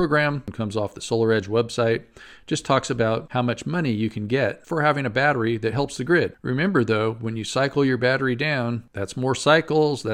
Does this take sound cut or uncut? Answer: uncut